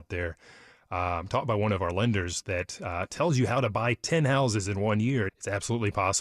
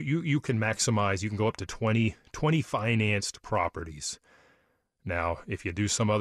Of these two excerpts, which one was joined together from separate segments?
first; 1 cut; at 5.3 s

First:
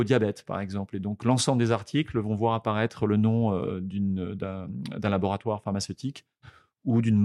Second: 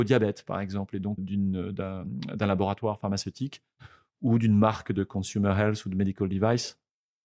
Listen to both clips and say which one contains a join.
second; 1 cut; at 1.2 s

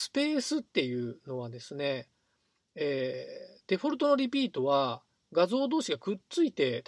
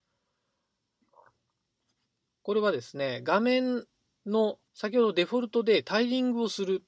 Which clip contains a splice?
second; 2 cuts; at 2.3 s, 4.7 s

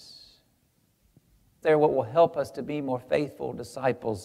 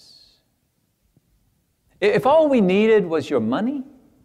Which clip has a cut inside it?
first; 1 cut; at 1.6 s

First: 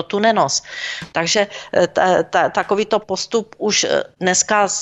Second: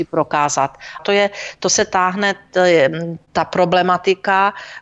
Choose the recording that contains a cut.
second; 1 cut; at 1.0 s

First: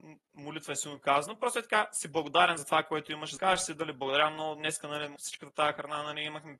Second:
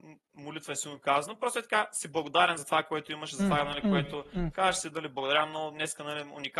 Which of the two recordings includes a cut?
first; 2 cuts; at 3.4 s, 5.2 s

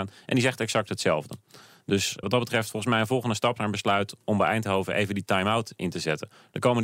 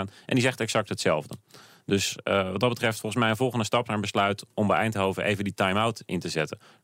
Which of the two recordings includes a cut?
first; 1 cut; at 2.2 s

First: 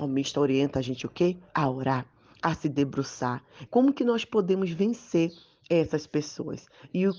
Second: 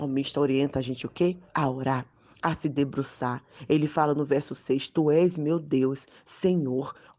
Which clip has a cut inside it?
first; 1 cut; at 3.7 s

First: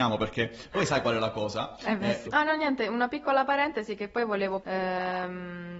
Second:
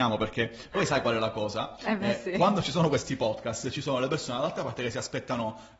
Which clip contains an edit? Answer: first; 2 cuts; at 2.2 s, 4.6 s

